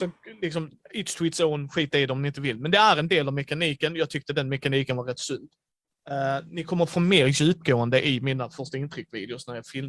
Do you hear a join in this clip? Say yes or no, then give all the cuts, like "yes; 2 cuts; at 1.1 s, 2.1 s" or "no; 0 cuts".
no; 0 cuts